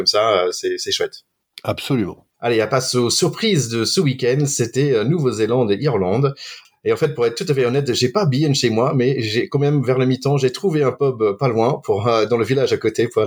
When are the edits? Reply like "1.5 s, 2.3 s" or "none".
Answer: 2.3 s